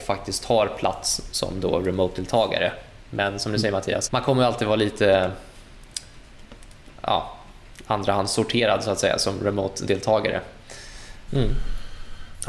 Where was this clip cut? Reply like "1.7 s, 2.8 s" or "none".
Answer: 4.1 s, 11.3 s